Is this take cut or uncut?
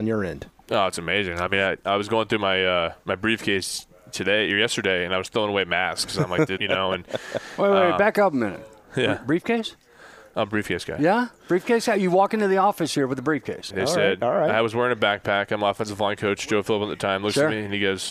cut